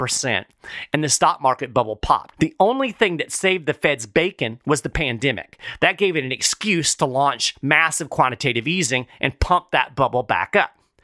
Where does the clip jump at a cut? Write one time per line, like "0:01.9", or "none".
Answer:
0:02.3